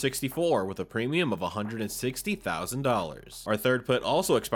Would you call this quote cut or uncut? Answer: uncut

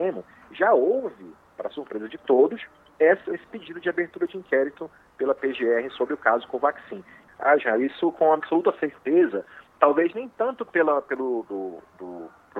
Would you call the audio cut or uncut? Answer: cut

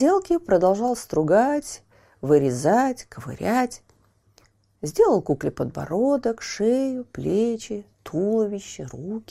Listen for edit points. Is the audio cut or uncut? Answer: uncut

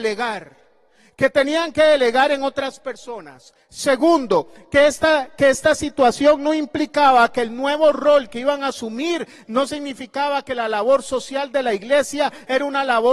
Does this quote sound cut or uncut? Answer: uncut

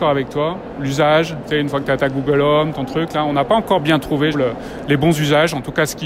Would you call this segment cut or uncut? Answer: cut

